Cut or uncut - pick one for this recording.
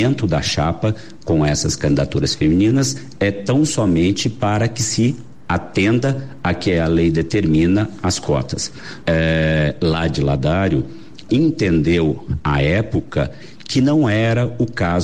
cut